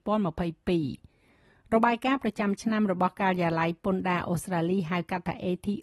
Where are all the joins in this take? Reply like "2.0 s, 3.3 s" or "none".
none